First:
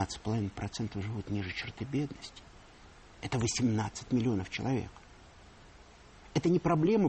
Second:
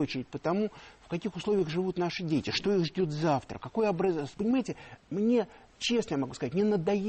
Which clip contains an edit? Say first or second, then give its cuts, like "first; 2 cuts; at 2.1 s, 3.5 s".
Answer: second; 1 cut; at 4.3 s